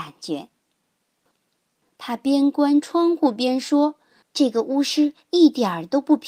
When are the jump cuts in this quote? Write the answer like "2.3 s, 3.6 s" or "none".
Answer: 1.3 s, 4.2 s